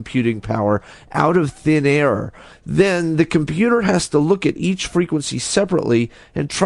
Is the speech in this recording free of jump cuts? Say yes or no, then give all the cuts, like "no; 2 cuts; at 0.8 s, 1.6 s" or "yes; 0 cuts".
no; 1 cut; at 2.5 s